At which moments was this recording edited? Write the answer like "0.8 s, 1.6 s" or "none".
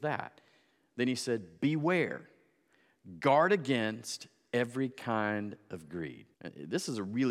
6.3 s

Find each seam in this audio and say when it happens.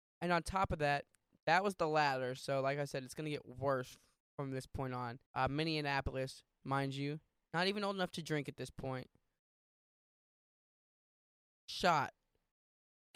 5.3 s, 6.6 s

